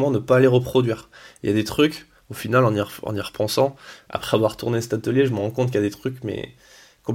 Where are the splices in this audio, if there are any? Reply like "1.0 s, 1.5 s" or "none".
none